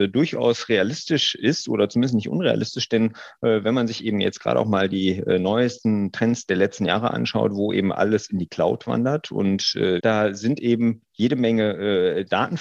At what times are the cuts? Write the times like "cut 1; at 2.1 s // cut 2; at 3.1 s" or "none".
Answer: cut 1; at 10.0 s